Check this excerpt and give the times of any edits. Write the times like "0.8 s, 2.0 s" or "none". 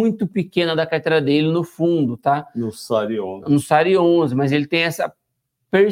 none